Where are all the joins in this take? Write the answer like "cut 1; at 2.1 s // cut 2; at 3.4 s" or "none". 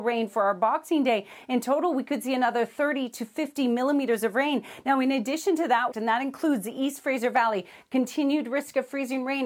cut 1; at 5.9 s